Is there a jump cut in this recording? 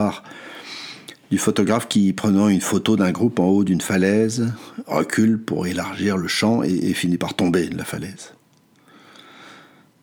no; 0 cuts

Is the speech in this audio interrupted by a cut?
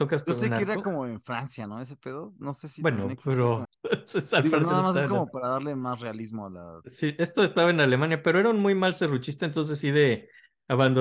yes; 1 cut; at 3.6 s

